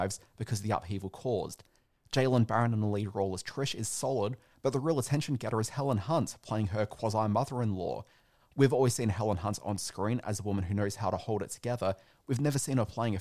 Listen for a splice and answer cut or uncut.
uncut